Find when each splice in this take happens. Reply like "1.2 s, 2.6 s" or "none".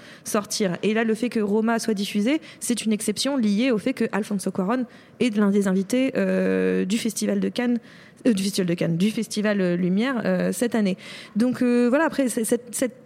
none